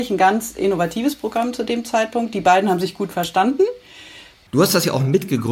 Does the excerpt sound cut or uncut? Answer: cut